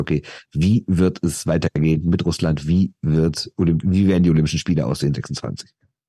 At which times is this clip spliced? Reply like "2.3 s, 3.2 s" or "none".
none